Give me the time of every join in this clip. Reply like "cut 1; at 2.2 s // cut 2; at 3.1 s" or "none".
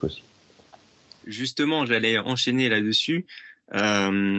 cut 1; at 1.2 s